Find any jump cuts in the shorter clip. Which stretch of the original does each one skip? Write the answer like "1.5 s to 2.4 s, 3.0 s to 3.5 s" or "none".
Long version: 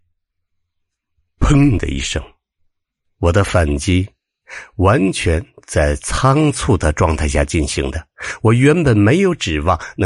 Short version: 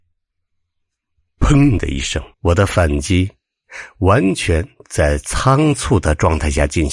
2.3 s to 3.1 s